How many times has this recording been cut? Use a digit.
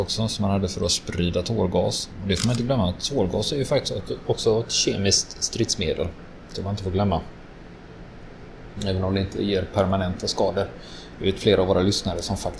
0